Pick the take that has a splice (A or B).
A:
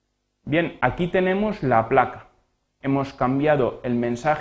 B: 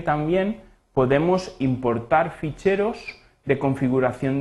A